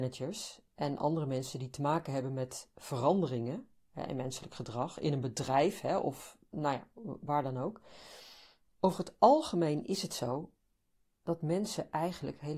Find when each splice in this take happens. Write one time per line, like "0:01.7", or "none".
0:08.6